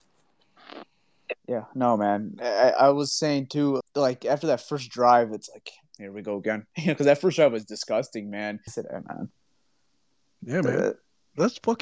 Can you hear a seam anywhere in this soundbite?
yes; 2 cuts; at 3.8 s, 8.7 s

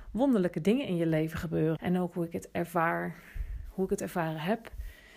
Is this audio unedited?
no; 1 cut; at 1.8 s

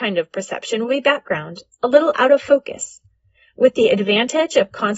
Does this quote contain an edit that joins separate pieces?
no; 0 cuts

